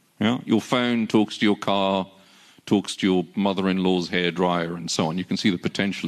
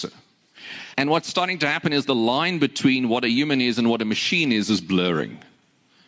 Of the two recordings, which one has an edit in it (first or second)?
second